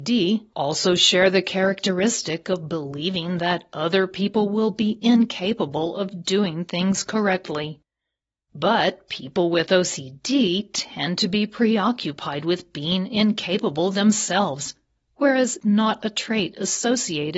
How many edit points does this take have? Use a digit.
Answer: 0